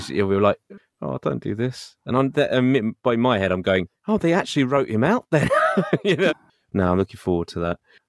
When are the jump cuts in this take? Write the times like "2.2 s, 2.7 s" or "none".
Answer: 4.0 s, 6.3 s